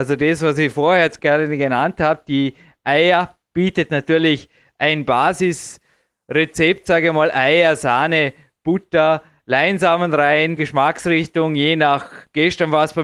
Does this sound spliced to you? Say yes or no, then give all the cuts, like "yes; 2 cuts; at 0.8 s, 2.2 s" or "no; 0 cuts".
yes; 1 cut; at 10.6 s